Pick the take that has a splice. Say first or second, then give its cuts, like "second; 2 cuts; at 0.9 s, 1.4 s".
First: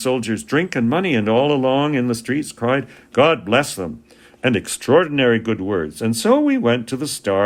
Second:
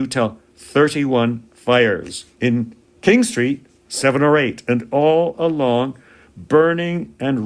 second; 1 cut; at 2.3 s